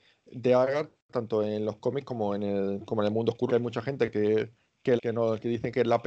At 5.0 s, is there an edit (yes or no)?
yes